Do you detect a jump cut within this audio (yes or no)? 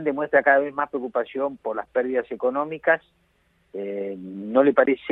no